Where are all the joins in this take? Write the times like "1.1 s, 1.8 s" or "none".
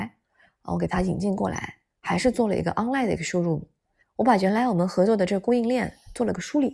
4.0 s